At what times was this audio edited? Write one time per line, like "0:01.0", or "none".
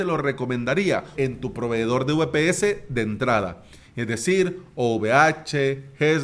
0:01.1